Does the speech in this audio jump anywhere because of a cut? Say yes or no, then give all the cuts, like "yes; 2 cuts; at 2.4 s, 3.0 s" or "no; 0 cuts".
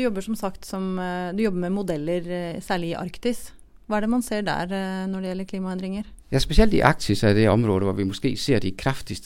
no; 0 cuts